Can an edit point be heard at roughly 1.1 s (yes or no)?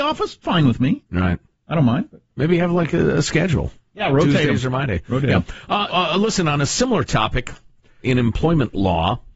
no